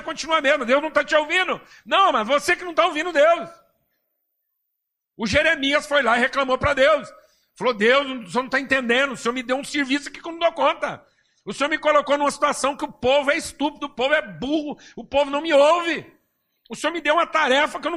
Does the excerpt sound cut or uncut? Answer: uncut